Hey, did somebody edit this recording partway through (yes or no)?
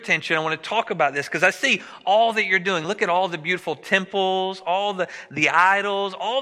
no